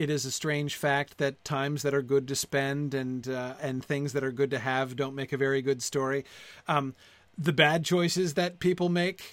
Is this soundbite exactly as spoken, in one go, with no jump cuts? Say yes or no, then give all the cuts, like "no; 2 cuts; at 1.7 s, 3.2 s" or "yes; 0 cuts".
no; 1 cut; at 3.6 s